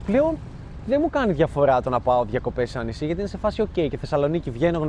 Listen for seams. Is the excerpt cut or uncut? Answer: uncut